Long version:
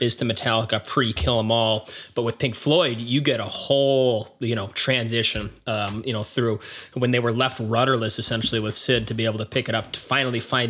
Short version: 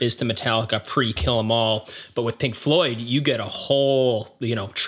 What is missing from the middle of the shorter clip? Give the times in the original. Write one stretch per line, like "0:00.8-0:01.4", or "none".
none